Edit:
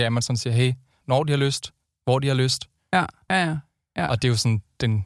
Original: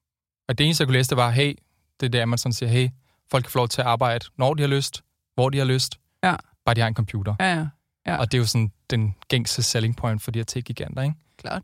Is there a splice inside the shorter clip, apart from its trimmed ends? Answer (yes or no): yes